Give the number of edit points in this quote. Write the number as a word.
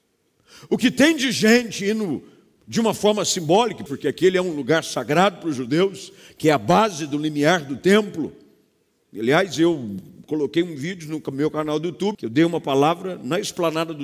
two